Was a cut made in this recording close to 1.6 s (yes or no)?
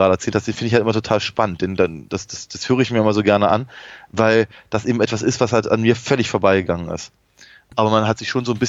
no